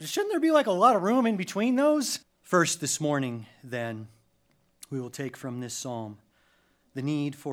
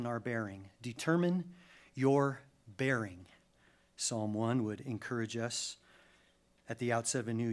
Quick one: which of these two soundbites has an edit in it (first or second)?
first